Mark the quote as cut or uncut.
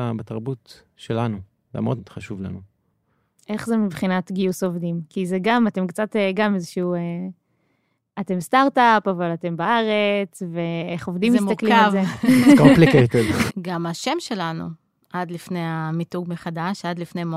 cut